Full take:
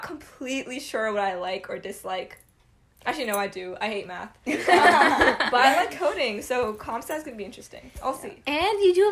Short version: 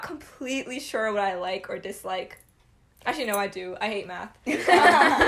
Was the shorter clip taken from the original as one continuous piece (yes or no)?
yes